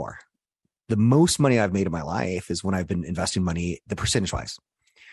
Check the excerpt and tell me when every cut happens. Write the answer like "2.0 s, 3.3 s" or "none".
3.9 s